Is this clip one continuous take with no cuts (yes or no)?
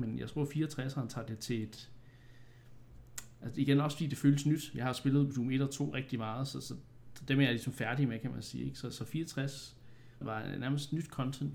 no